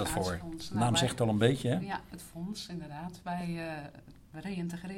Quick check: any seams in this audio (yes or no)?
no